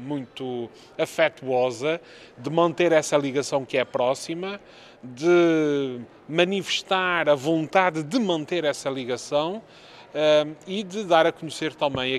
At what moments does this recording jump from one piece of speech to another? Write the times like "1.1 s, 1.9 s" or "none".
none